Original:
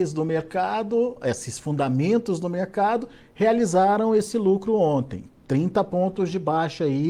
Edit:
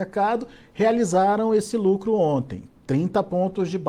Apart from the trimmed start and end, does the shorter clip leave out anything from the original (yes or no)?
no